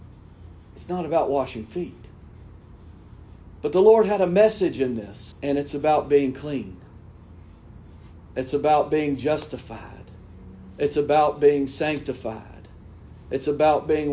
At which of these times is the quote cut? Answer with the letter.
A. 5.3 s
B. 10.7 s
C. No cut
A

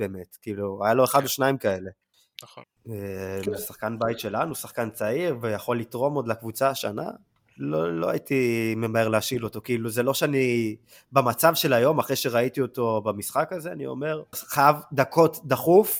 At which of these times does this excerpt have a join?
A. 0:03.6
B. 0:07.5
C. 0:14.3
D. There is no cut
C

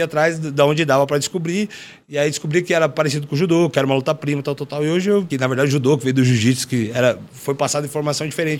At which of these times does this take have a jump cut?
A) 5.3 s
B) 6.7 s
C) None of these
A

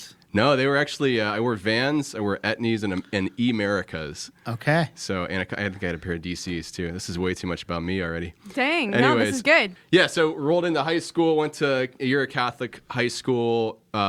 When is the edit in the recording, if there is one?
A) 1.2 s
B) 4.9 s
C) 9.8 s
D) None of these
C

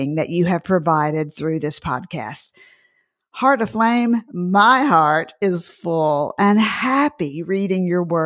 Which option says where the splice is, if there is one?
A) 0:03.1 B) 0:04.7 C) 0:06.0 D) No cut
D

